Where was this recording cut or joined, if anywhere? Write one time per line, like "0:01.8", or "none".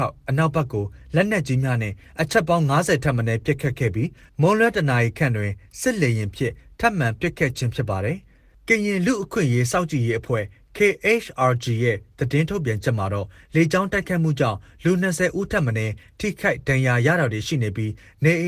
none